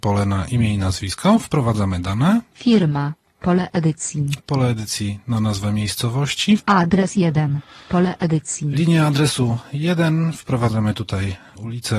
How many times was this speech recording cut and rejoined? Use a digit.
3